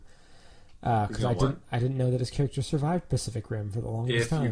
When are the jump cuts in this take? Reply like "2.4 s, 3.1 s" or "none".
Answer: none